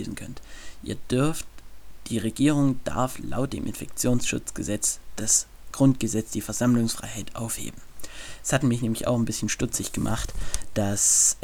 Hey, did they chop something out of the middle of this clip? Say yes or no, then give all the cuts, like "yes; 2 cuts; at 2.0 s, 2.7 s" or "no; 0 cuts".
no; 0 cuts